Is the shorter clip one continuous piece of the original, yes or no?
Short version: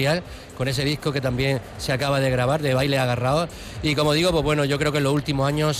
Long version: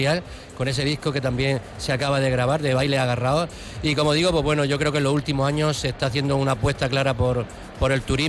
yes